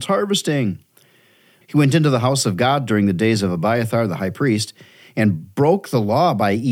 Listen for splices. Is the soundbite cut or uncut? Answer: cut